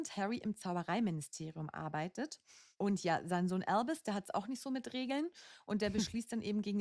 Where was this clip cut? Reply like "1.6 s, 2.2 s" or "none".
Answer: none